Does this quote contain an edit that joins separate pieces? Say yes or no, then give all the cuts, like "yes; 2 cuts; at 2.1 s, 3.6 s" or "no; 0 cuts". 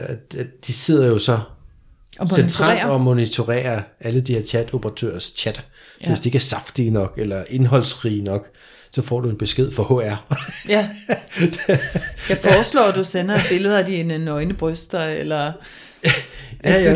no; 0 cuts